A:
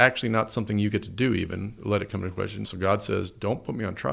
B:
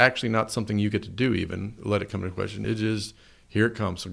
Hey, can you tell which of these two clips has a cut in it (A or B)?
A